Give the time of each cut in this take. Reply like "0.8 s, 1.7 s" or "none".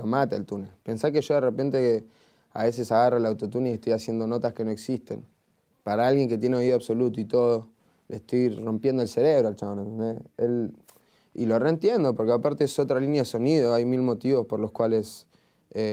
none